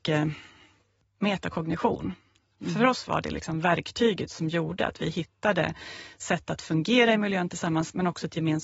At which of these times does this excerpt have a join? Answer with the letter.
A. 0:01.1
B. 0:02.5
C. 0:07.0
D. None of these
B